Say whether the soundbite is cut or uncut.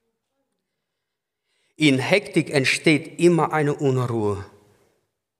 uncut